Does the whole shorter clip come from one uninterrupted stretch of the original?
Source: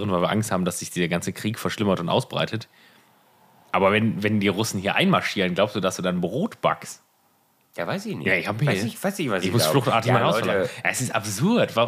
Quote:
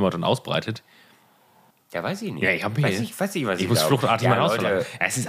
no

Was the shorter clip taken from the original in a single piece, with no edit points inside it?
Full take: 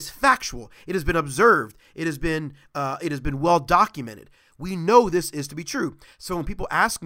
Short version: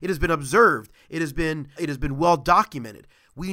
no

